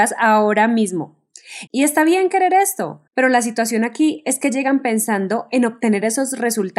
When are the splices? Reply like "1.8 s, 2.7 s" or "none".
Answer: 1.7 s, 3.1 s